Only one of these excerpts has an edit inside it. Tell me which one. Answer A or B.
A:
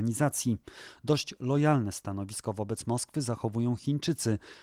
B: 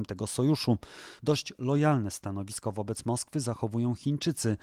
B